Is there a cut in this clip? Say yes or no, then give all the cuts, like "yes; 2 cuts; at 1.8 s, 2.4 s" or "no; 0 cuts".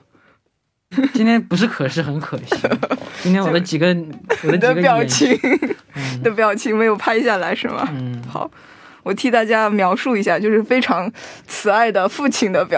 yes; 1 cut; at 0.9 s